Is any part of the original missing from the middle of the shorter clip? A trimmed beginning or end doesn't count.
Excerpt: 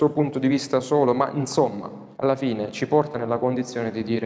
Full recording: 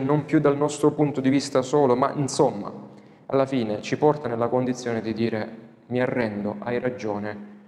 yes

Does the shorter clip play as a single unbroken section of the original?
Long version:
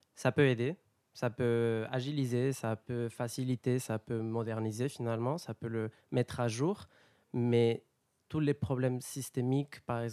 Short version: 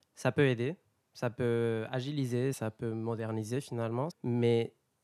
no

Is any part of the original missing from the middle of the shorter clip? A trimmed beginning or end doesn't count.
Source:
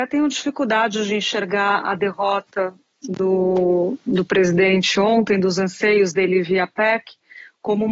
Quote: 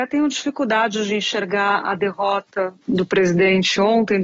yes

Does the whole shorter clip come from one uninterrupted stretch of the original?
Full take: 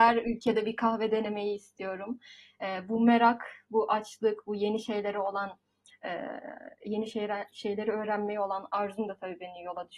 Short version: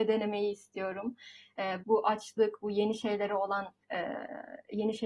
no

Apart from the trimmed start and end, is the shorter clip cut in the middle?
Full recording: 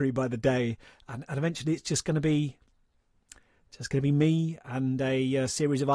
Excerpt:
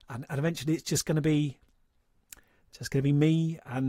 no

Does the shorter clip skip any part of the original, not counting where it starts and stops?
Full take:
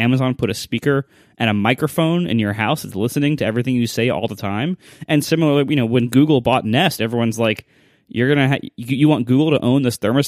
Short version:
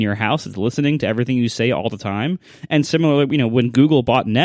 no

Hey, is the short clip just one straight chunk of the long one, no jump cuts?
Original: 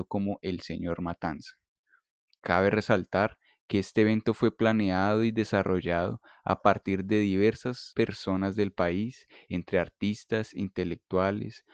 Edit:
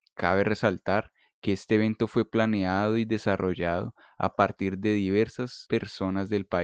yes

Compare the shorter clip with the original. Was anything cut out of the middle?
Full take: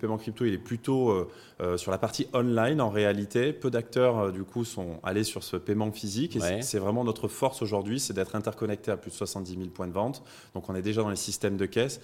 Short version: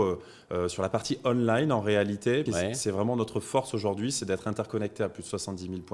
yes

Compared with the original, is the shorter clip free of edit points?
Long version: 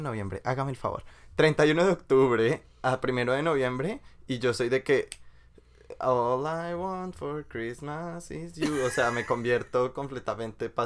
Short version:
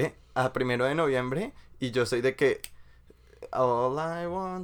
yes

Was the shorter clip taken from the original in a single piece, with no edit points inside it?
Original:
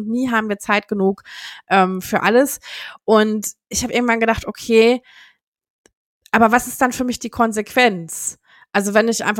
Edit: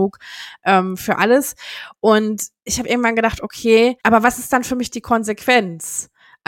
no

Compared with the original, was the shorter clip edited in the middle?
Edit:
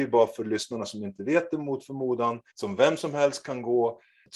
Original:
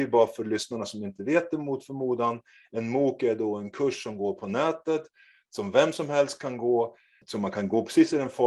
yes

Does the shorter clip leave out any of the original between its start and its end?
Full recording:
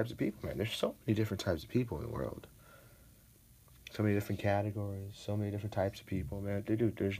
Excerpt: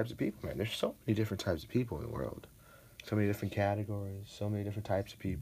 yes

